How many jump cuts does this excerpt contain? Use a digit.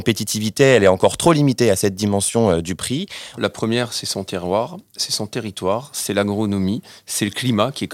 1